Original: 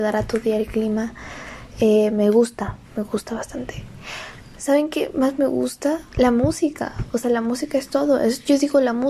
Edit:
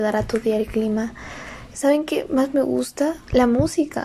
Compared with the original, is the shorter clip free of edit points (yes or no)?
no